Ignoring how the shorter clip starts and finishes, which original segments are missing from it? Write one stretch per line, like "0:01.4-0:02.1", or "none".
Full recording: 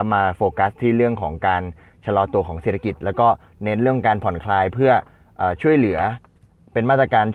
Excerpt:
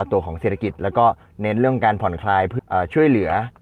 0:04.8-0:05.3